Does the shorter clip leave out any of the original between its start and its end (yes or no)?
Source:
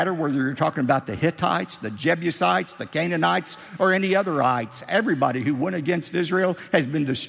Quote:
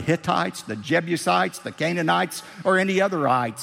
no